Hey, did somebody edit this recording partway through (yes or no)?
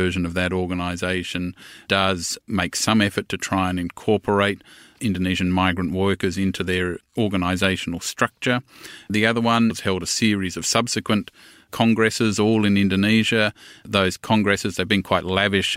yes